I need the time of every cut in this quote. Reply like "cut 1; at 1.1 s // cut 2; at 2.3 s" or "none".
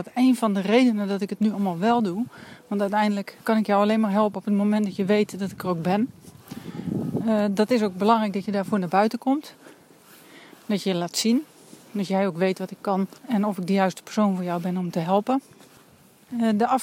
cut 1; at 13.2 s